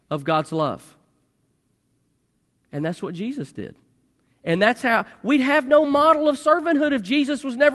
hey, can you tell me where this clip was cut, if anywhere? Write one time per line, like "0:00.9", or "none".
0:02.6